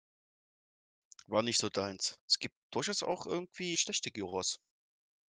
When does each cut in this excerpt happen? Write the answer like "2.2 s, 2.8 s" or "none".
2.2 s, 3.7 s